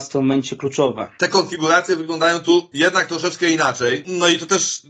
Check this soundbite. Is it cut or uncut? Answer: cut